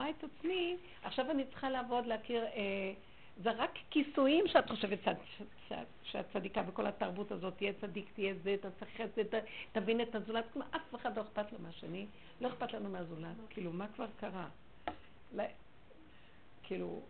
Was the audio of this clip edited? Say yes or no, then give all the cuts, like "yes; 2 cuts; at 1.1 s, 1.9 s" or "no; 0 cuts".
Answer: yes; 2 cuts; at 13.5 s, 15.3 s